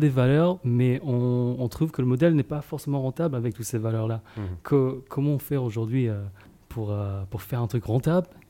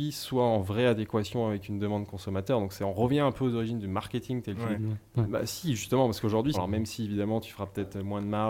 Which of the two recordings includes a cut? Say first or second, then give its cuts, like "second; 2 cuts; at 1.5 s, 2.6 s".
second; 2 cuts; at 4.7 s, 6.5 s